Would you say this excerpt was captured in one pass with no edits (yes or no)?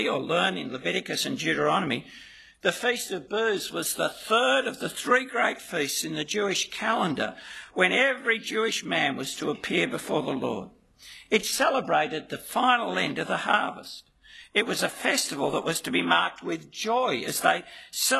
yes